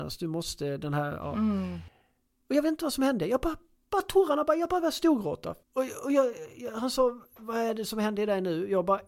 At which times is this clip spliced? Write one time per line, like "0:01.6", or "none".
0:05.6